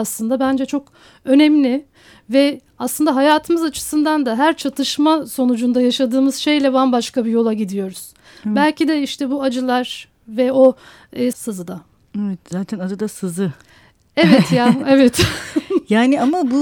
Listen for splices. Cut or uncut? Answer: cut